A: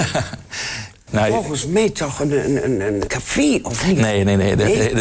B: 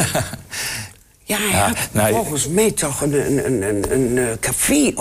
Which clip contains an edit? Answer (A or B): A